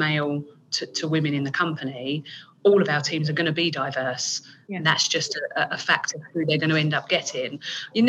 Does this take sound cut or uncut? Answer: uncut